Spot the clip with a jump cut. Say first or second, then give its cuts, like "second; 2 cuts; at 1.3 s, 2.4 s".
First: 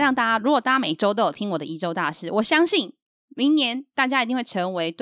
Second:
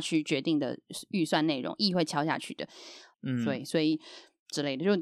second; 1 cut; at 3.1 s